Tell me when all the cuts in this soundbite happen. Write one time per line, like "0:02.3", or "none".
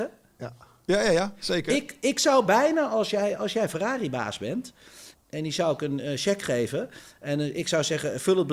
0:05.1